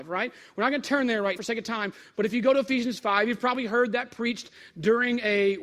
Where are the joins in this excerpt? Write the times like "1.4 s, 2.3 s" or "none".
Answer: 1.4 s